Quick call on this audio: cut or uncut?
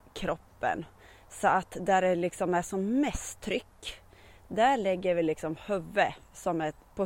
uncut